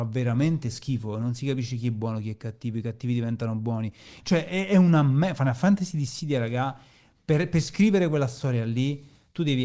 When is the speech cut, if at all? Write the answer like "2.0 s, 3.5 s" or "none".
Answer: 4.2 s